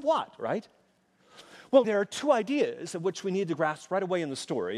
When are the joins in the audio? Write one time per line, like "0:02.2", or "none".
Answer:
0:01.8